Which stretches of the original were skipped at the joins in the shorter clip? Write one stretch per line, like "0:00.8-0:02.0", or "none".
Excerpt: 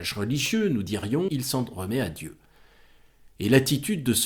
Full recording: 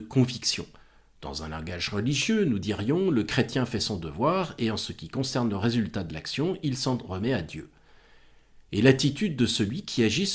0:03.0-0:06.6